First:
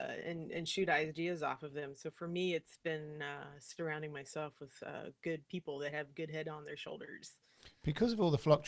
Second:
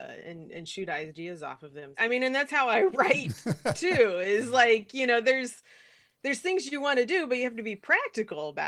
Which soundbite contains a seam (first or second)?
second